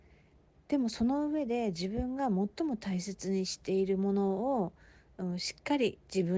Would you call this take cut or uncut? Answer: uncut